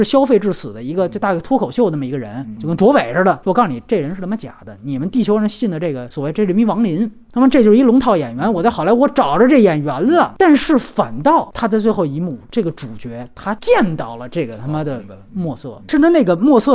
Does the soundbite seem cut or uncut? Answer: uncut